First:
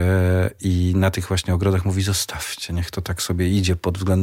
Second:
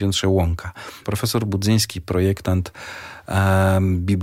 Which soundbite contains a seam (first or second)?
second